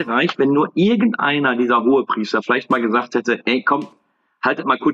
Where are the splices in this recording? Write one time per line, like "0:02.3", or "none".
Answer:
none